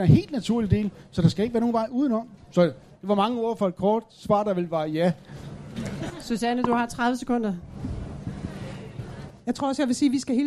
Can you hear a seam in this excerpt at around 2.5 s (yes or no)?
no